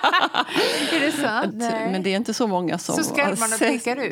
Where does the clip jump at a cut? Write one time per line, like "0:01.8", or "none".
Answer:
0:01.5